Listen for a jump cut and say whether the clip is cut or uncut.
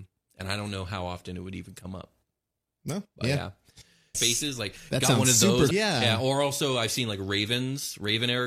cut